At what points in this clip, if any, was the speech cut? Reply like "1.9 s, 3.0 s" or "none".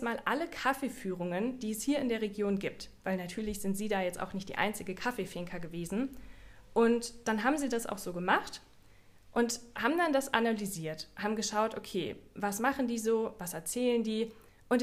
none